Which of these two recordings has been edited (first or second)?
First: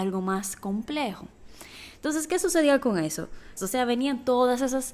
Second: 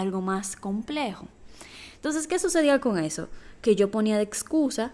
first